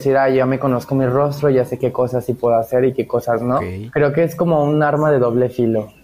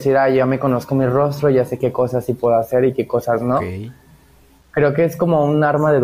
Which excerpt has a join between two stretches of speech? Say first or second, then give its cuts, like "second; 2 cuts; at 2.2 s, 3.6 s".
first; 1 cut; at 3.9 s